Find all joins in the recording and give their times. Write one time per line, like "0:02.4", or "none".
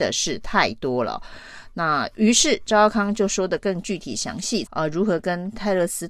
0:04.7